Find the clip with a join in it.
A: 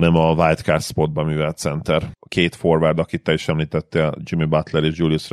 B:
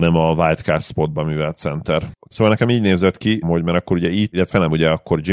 B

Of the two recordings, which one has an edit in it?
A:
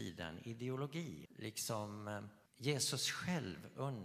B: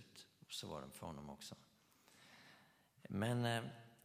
A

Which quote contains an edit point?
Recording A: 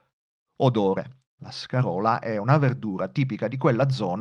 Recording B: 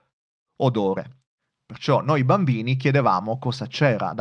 A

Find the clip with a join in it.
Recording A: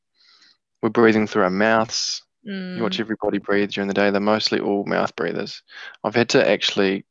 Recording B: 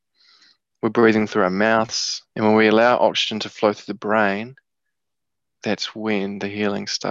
B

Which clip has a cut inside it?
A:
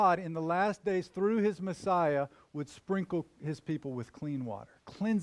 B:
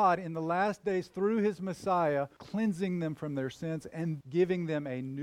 B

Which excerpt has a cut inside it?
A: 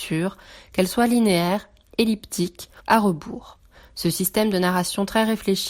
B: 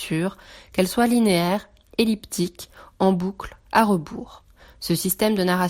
A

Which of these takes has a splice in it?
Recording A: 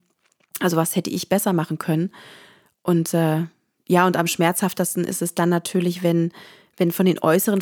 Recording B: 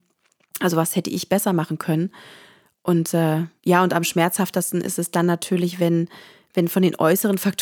B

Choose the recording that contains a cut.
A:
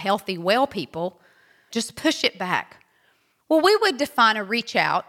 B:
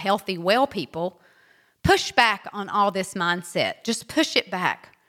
A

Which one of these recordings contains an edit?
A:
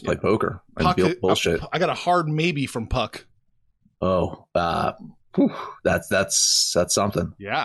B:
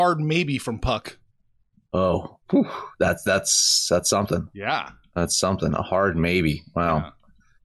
B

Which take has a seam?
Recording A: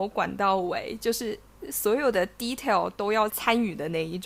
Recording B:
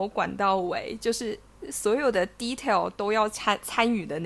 A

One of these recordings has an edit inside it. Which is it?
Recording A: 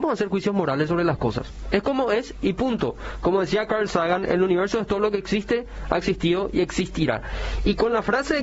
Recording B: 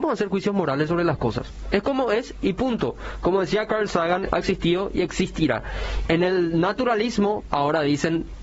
B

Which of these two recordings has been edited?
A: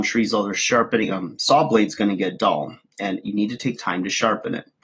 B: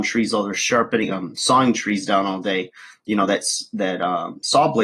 A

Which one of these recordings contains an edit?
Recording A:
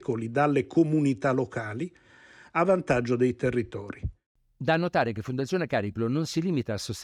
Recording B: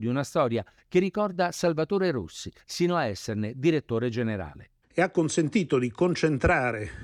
B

